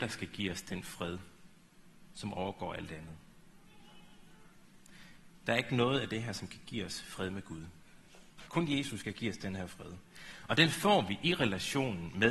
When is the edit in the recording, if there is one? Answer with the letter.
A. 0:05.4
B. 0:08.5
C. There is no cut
B